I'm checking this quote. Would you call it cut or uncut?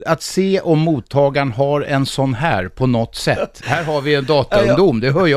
uncut